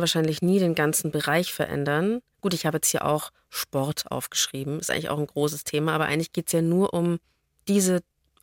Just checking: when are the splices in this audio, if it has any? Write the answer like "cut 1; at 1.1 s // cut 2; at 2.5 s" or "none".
none